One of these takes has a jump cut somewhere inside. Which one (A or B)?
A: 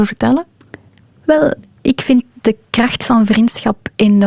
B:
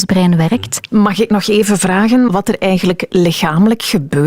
B